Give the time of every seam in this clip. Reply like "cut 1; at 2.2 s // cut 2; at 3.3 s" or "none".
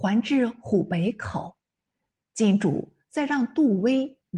cut 1; at 2.1 s